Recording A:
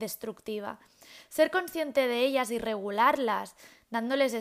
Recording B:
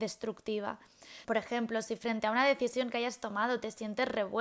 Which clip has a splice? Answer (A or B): B